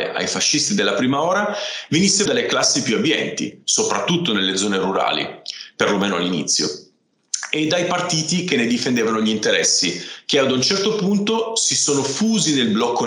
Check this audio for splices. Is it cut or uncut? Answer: cut